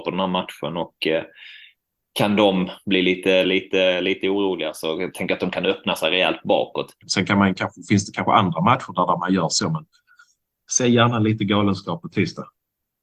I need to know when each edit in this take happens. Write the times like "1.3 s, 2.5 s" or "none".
3.4 s, 7.0 s